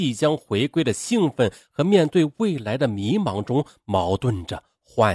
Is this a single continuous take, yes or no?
yes